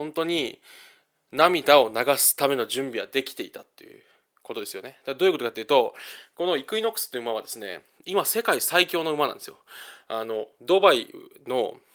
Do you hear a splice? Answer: no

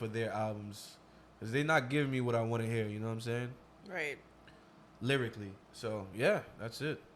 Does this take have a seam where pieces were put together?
yes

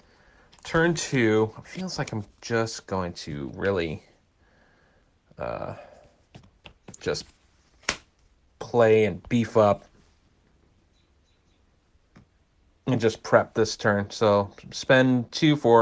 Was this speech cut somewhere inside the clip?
no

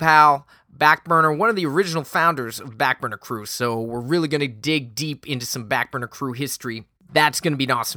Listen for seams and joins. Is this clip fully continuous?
yes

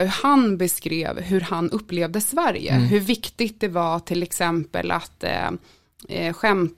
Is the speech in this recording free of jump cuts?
yes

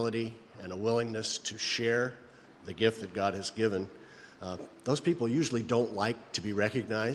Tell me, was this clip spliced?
no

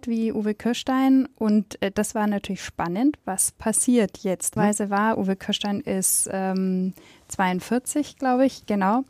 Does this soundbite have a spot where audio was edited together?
yes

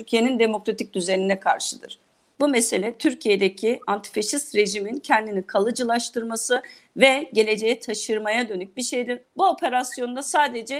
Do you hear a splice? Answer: yes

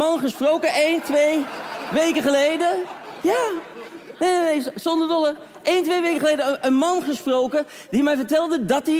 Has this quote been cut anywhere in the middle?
no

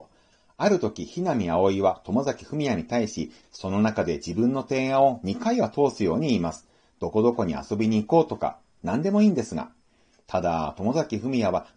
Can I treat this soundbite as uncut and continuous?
no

